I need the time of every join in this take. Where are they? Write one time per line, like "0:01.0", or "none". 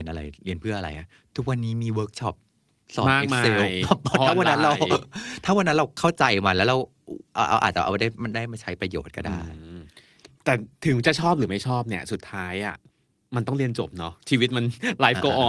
0:10.7